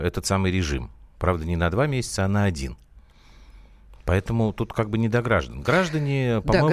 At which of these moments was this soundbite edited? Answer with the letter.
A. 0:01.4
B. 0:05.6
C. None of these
C